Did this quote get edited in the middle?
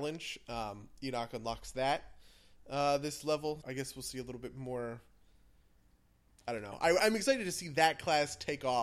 yes; 2 cuts; at 3.6 s, 7.0 s

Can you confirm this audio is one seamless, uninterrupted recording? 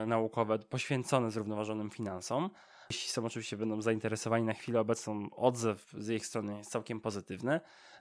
yes; 0 cuts

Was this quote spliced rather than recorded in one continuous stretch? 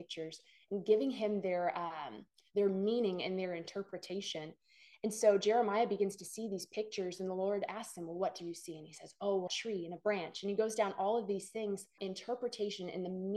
yes; 2 cuts; at 9.5 s, 12.0 s

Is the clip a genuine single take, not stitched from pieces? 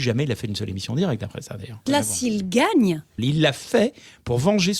no; 2 cuts; at 1.9 s, 3.2 s

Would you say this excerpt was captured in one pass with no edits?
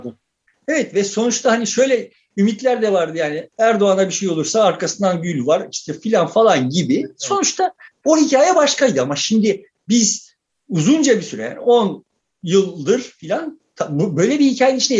no; 1 cut; at 3.5 s

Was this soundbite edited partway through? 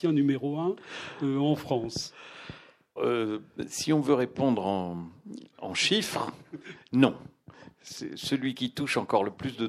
yes; 1 cut; at 3.0 s

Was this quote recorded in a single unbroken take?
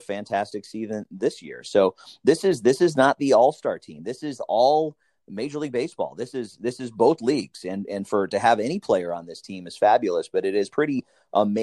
yes; 0 cuts

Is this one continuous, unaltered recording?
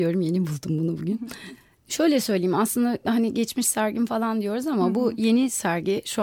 no; 1 cut; at 1.8 s

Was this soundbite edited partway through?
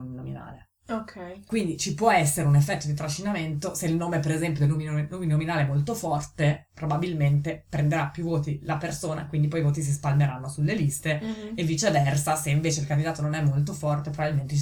no; 0 cuts

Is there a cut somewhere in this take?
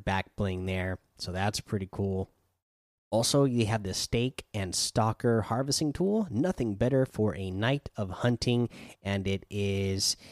yes; 1 cut; at 3.0 s

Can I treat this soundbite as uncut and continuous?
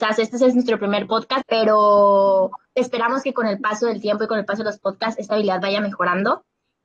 no; 2 cuts; at 1.4 s, 2.6 s

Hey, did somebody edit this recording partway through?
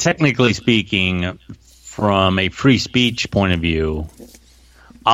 no; 0 cuts

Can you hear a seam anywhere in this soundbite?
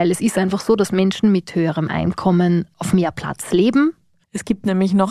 yes; 1 cut; at 4.2 s

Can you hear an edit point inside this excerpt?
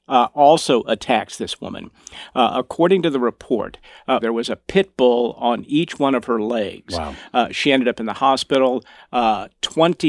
yes; 1 cut; at 4.2 s

